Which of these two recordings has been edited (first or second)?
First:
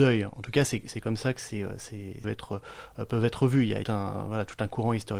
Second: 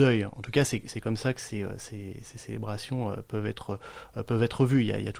first